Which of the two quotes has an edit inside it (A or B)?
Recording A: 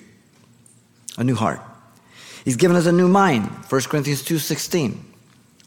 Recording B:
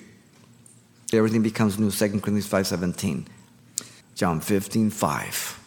B